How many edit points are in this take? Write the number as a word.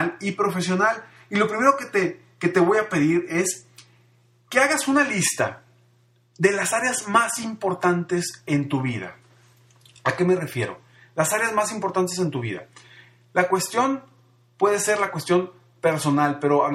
zero